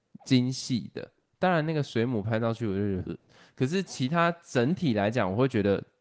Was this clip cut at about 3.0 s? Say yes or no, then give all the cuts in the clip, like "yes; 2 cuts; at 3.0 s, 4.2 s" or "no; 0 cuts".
yes; 1 cut; at 3.0 s